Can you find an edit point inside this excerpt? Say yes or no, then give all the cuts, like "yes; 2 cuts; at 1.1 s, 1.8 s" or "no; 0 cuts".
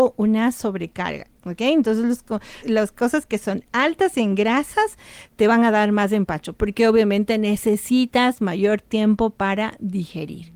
yes; 3 cuts; at 1.4 s, 2.6 s, 6.5 s